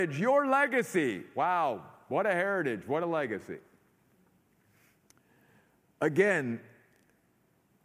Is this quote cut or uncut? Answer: uncut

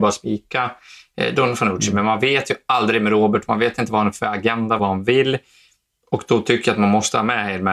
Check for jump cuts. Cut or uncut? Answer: cut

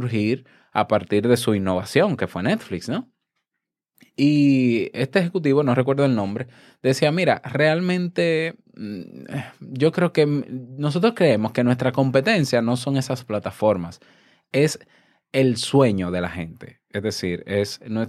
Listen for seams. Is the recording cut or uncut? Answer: uncut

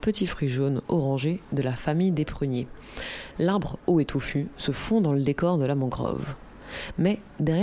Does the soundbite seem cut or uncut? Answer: uncut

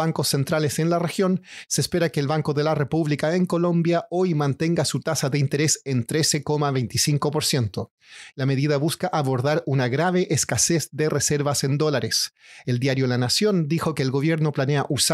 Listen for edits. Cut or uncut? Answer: cut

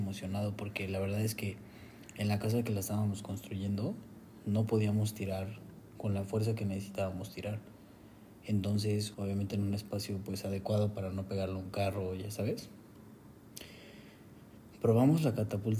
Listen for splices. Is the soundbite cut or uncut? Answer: cut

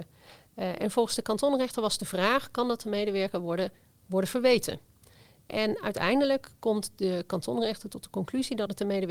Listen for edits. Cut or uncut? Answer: cut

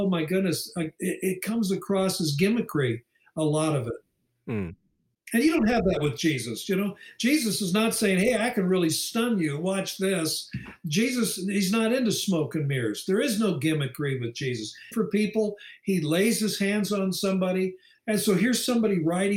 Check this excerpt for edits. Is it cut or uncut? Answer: cut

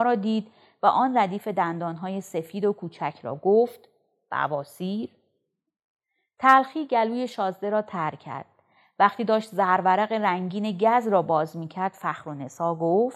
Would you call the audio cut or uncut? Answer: uncut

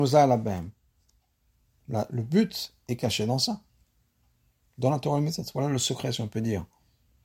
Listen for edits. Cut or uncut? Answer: uncut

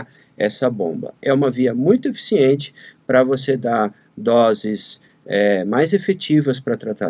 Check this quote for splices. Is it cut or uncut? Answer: uncut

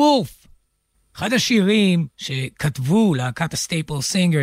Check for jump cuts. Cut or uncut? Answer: cut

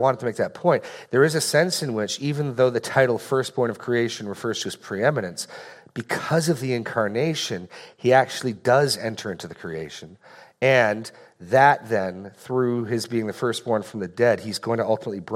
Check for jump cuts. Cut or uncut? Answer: uncut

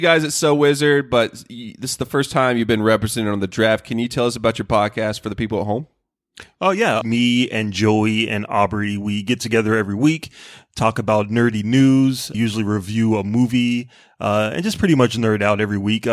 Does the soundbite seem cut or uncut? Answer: cut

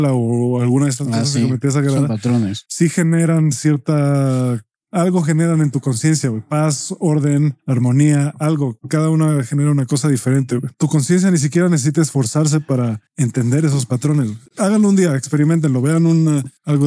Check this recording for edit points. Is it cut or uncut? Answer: uncut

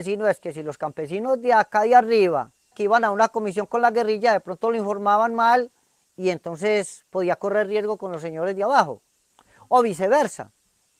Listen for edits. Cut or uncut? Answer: cut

